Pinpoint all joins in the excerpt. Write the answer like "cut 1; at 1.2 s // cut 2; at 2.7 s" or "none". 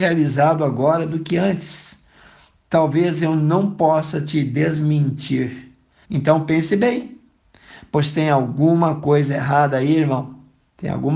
cut 1; at 6.0 s